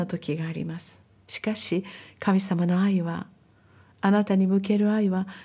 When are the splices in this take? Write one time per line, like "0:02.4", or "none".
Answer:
none